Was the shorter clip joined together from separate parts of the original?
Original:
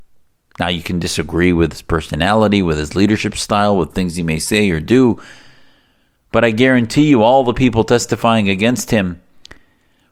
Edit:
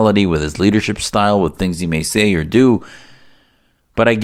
no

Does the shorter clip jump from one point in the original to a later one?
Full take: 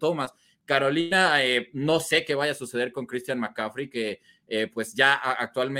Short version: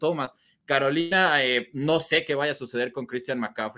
no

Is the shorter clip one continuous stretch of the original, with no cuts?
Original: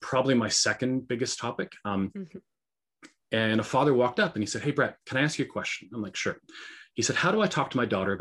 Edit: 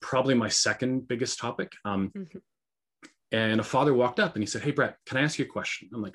yes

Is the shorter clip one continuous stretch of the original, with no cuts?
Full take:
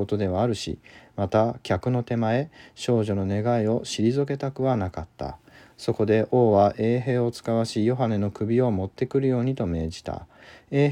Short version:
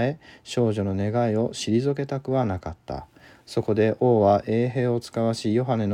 yes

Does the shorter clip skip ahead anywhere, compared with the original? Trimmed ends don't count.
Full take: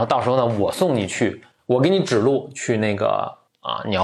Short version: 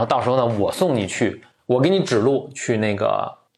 no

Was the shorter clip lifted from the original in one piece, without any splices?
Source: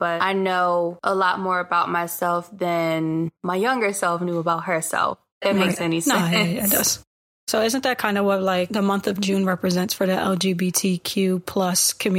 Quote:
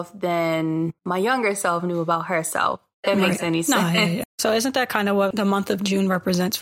no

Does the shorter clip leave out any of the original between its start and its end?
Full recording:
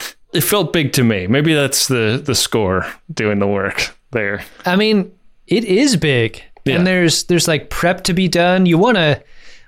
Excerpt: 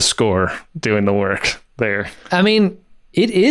no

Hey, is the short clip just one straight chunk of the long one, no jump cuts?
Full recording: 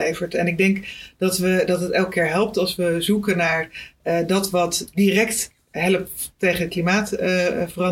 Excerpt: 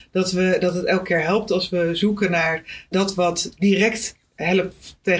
no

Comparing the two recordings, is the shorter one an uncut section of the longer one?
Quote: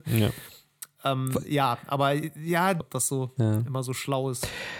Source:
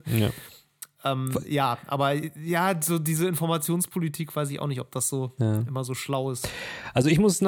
no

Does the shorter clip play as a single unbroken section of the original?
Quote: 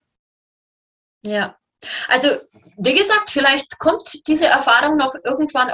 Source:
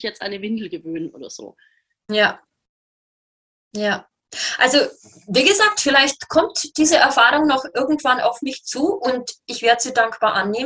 yes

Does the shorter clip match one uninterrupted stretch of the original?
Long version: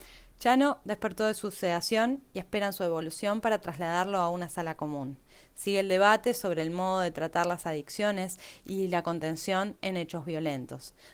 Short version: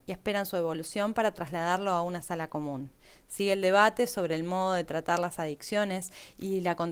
yes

